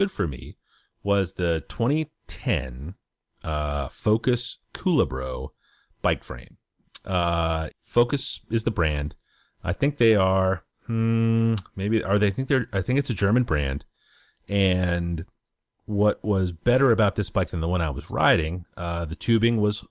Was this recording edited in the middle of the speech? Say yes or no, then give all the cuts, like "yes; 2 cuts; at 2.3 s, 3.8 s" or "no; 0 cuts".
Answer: yes; 1 cut; at 7.7 s